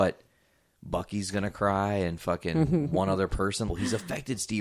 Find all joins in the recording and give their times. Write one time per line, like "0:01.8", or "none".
0:03.7